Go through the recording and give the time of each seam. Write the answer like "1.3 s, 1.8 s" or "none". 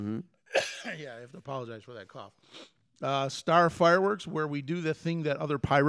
none